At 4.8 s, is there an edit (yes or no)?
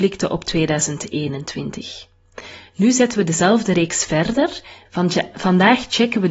yes